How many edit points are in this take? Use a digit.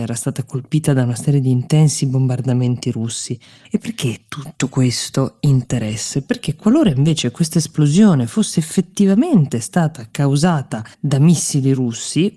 2